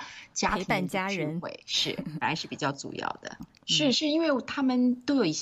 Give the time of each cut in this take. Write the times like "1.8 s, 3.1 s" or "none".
3.4 s